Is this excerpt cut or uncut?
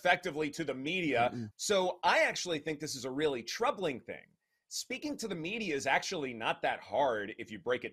cut